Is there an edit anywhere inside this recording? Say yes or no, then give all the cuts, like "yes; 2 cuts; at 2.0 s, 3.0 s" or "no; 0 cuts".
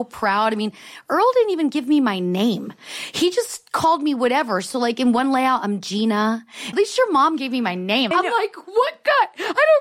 yes; 2 cuts; at 6.7 s, 8.1 s